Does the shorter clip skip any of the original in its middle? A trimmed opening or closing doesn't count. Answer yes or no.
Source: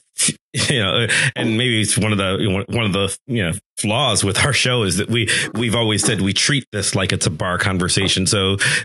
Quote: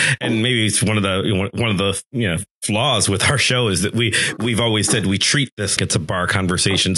yes